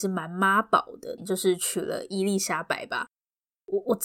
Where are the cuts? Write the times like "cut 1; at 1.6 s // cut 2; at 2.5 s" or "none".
cut 1; at 1.2 s